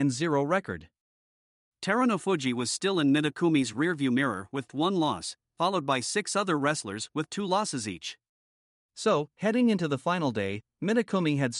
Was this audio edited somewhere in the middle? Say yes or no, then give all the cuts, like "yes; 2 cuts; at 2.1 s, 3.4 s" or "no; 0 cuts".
yes; 2 cuts; at 4.7 s, 8.9 s